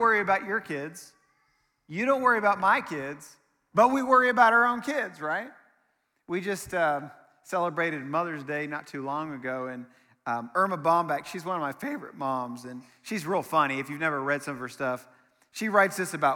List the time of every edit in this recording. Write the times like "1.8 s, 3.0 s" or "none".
none